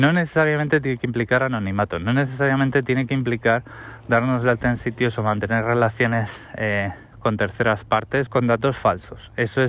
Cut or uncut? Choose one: cut